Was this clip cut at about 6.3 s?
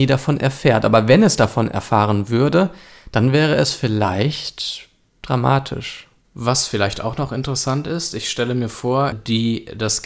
no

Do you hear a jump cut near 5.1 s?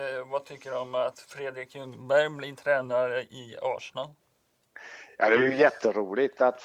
no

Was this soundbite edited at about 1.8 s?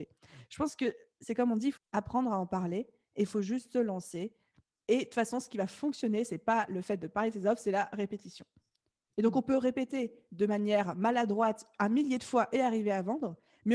yes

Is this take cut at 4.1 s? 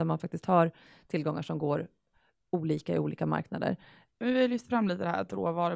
yes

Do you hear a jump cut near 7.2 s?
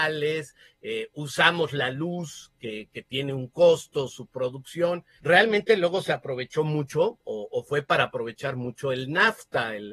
no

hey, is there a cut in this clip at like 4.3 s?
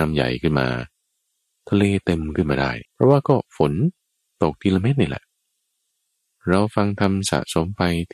no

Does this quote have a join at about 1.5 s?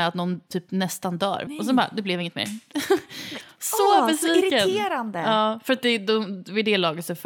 yes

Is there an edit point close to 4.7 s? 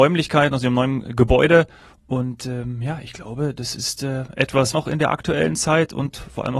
yes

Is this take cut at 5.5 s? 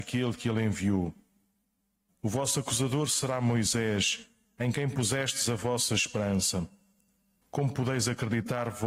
no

